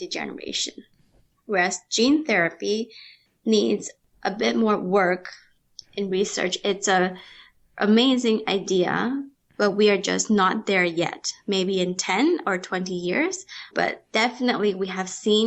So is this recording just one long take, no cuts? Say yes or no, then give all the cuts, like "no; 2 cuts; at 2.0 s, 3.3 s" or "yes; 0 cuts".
no; 1 cut; at 13.7 s